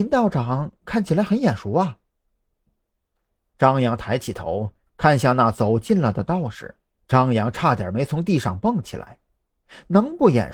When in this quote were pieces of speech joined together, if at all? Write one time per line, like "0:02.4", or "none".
0:07.0